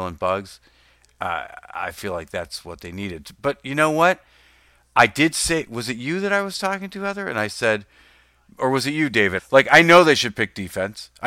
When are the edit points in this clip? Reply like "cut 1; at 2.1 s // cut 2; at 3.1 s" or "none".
cut 1; at 9.4 s